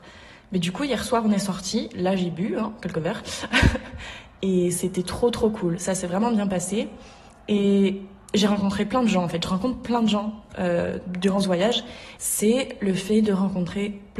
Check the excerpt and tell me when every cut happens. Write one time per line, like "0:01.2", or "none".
0:12.2